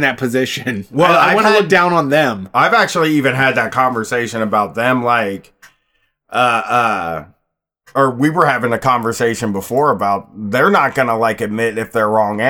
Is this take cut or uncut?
uncut